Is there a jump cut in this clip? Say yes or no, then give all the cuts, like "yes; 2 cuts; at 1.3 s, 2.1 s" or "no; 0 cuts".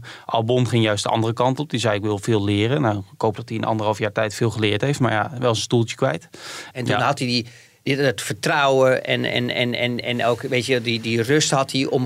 yes; 2 cuts; at 6.7 s, 10.0 s